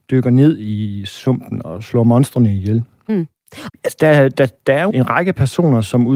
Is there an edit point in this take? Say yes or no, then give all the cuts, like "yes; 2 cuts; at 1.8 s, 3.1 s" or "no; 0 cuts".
yes; 2 cuts; at 3.7 s, 4.9 s